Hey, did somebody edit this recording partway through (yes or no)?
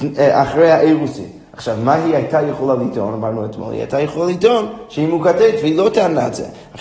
no